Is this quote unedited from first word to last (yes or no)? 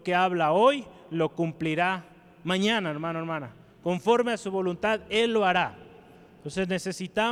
yes